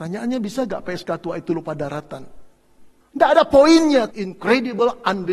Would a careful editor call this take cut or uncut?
cut